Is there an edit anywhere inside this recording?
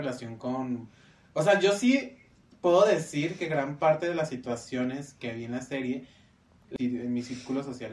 yes; 2 cuts; at 5.2 s, 6.8 s

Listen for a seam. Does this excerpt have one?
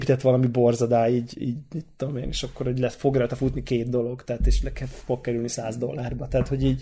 yes; 1 cut; at 1.3 s

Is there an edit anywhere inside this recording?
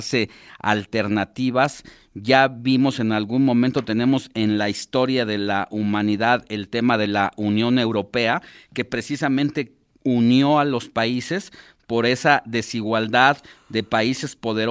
no; 0 cuts

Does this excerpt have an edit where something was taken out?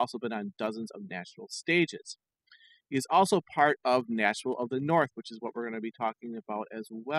no; 0 cuts

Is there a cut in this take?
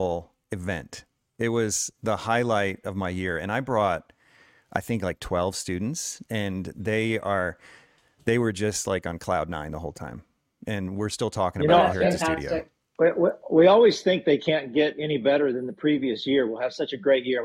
no; 0 cuts

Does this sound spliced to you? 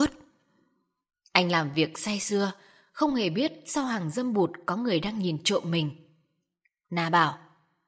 no; 0 cuts

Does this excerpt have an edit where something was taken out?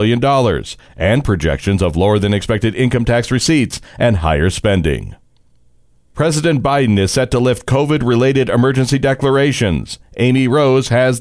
no; 0 cuts

